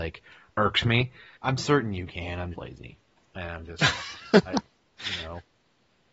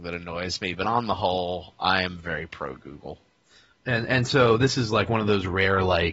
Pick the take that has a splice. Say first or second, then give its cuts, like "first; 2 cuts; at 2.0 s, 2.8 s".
first; 2 cuts; at 1.4 s, 2.5 s